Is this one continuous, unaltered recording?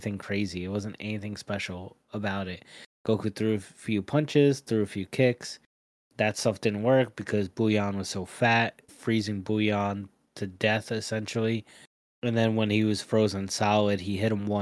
no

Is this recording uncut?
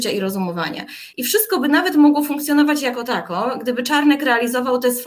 yes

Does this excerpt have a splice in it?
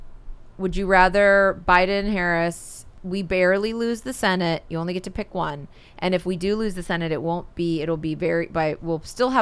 no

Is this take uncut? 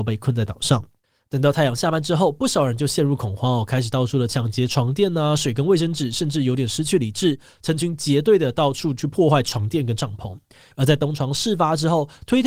no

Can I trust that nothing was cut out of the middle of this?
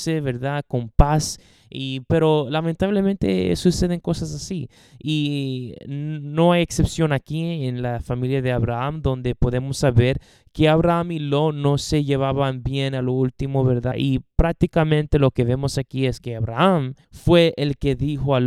no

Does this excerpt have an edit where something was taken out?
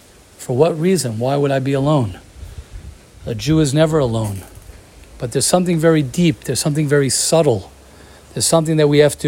no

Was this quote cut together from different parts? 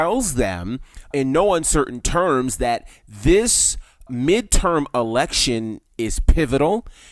yes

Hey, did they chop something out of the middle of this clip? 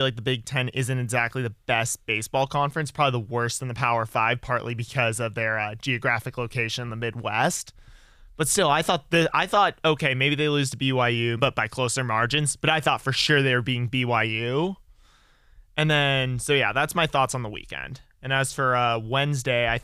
yes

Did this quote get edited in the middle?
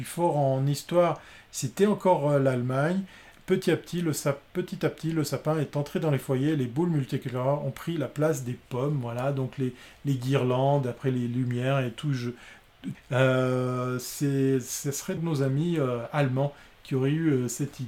yes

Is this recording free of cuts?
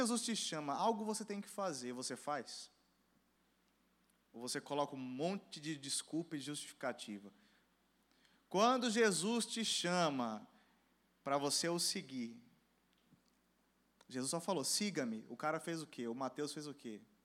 yes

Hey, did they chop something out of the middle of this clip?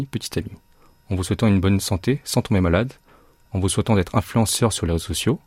no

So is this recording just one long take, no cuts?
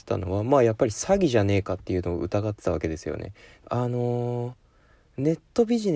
no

